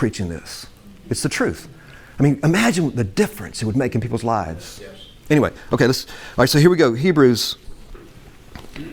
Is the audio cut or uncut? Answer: uncut